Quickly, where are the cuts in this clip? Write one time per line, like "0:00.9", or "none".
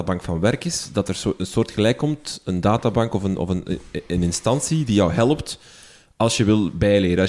none